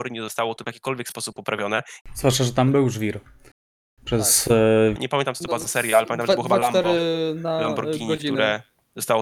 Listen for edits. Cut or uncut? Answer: cut